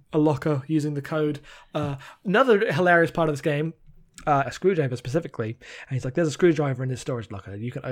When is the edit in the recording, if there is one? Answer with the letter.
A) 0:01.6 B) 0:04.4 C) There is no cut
B